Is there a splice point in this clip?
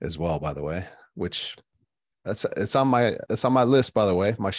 yes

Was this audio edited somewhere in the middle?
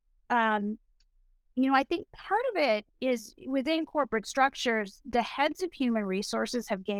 no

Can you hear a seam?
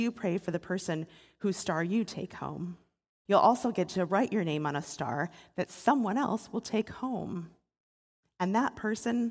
yes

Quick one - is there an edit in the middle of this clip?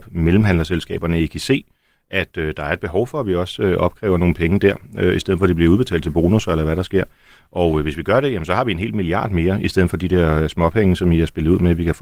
no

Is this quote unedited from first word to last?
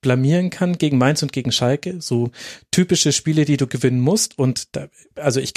yes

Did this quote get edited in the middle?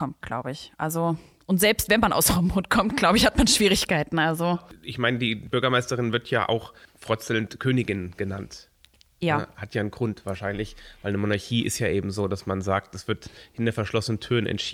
no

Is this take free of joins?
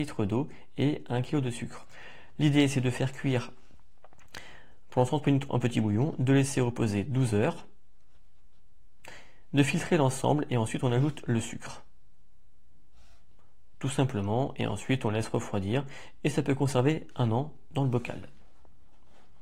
yes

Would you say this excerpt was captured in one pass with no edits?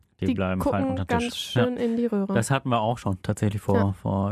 no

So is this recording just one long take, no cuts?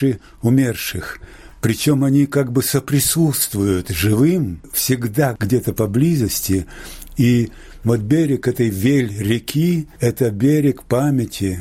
yes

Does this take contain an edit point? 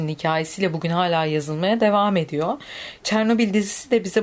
no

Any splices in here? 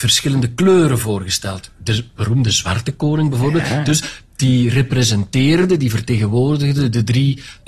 no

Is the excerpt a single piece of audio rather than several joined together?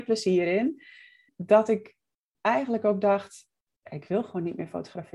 no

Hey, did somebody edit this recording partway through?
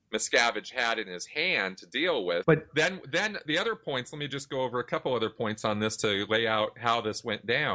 yes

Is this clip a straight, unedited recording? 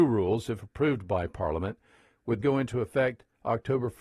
no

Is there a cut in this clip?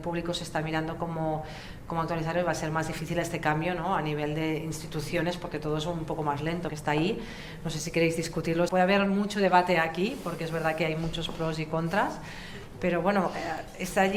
yes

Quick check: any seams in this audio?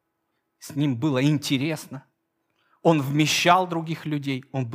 no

